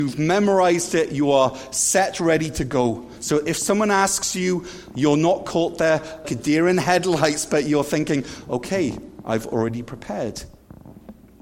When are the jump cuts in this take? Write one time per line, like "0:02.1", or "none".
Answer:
0:06.2

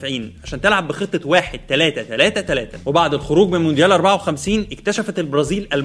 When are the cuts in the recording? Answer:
none

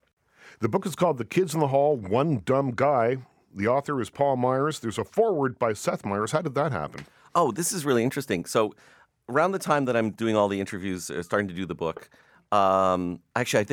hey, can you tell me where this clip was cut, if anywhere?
none

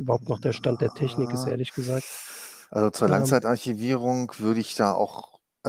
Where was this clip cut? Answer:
none

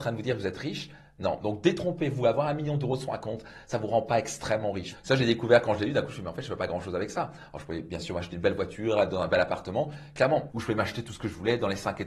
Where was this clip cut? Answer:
0:04.9
0:10.5

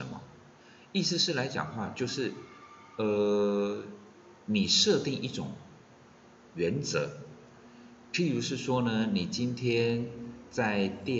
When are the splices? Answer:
none

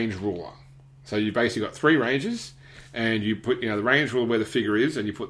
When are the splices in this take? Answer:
none

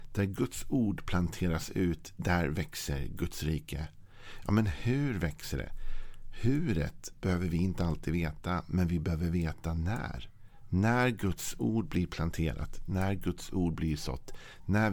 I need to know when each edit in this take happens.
none

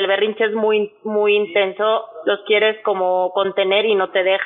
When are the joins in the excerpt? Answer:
none

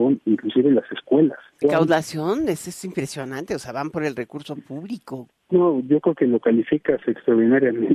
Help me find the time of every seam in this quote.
0:01.6
0:05.3

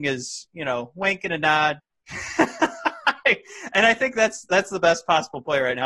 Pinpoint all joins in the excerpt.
0:01.8

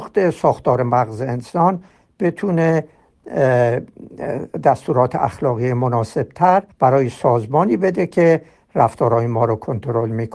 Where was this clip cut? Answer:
0:06.7

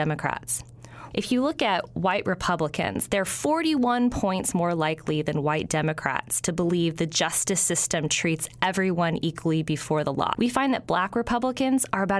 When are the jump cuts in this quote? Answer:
0:01.1
0:10.3

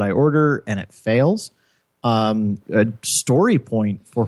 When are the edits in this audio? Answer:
0:02.6

